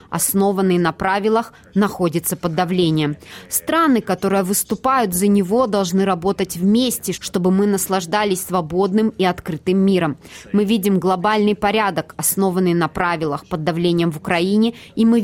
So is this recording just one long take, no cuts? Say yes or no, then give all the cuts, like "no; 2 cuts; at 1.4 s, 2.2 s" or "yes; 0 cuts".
no; 1 cut; at 7.1 s